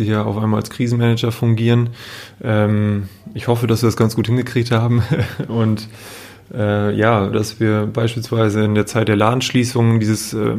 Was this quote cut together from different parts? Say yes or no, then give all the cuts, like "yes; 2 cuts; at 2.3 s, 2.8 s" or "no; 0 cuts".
yes; 1 cut; at 7.3 s